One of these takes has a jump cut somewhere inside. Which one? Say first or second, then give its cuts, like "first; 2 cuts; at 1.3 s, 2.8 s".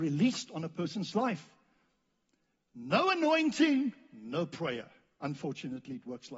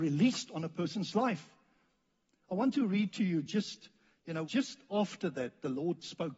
second; 2 cuts; at 2.4 s, 4.4 s